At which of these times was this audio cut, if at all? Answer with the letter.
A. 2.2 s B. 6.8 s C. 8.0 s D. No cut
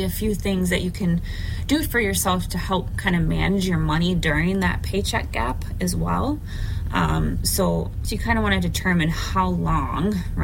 C